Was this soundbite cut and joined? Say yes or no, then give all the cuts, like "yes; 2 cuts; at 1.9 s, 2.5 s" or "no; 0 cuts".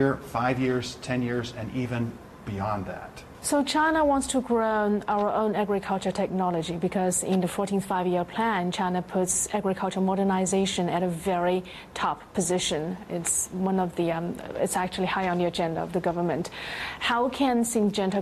no; 0 cuts